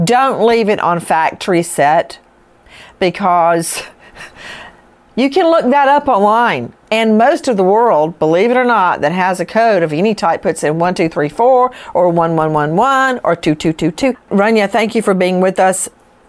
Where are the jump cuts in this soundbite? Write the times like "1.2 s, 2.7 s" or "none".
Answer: 6.9 s, 14.1 s